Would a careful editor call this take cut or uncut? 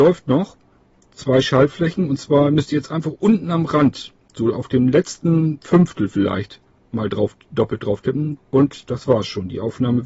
cut